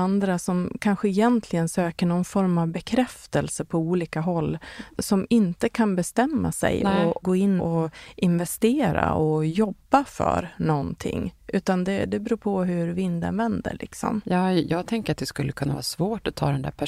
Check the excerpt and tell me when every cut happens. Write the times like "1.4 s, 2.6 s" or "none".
7.6 s